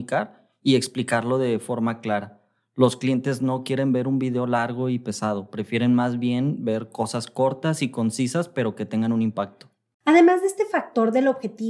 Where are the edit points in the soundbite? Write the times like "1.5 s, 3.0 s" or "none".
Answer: none